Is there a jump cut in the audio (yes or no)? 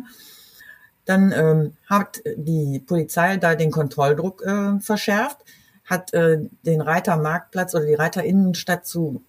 no